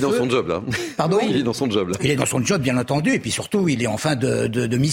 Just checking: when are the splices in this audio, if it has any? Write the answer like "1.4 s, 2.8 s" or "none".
none